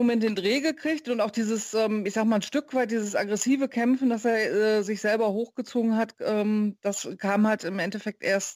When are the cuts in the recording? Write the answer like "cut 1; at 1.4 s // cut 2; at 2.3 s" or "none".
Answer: none